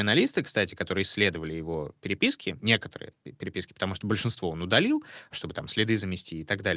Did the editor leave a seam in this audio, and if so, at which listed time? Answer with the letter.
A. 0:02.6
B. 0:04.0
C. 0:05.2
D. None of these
A